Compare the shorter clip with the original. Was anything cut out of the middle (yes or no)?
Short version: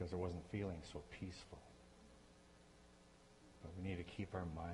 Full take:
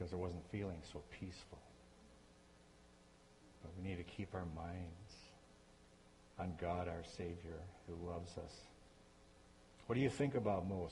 no